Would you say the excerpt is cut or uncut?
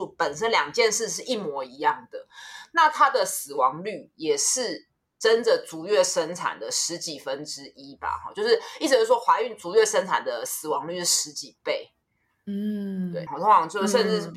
cut